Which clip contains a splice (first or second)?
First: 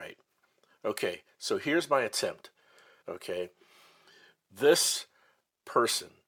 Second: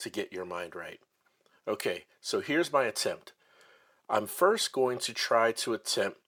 first